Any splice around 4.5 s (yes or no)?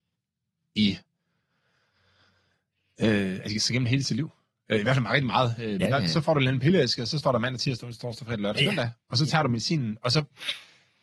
no